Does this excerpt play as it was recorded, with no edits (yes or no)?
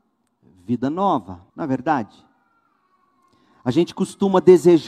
no